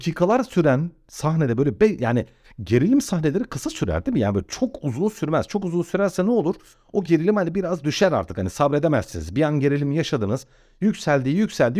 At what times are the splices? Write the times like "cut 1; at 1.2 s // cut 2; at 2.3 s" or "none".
none

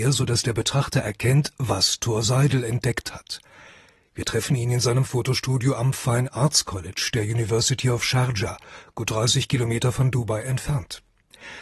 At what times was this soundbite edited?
none

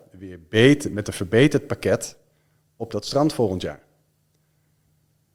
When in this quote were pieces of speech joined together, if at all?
none

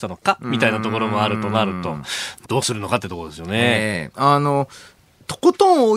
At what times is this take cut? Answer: cut 1; at 2.4 s // cut 2; at 4.1 s

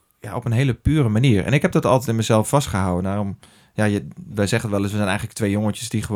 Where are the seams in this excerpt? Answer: cut 1; at 4.2 s

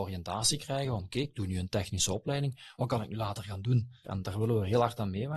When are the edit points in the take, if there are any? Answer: cut 1; at 4.0 s

